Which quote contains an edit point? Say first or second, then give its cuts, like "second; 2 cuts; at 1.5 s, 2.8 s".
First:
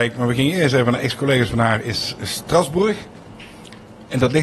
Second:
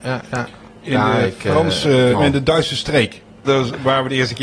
second; 2 cuts; at 2.1 s, 3.4 s